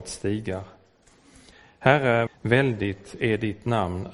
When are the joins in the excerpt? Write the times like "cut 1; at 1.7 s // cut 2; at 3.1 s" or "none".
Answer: cut 1; at 2.3 s